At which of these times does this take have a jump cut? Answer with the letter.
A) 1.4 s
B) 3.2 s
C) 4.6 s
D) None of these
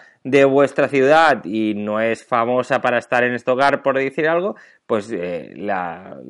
D